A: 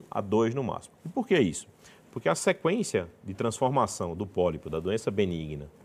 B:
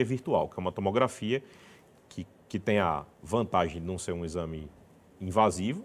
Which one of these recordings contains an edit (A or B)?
A